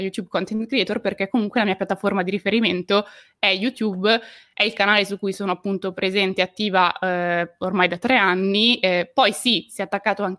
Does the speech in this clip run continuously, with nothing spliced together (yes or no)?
yes